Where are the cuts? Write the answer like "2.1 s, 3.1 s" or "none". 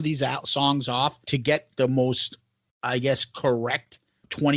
1.2 s